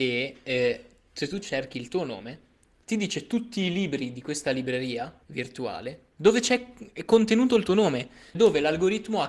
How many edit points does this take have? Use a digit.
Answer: 2